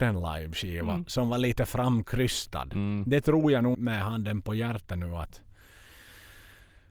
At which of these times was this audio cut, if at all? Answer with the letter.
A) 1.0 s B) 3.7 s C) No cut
B